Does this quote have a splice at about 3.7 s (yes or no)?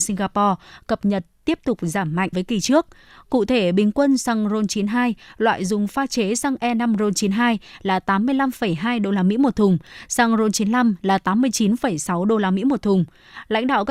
no